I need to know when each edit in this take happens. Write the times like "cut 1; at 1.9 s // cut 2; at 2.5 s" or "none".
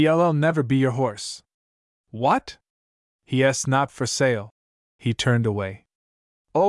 none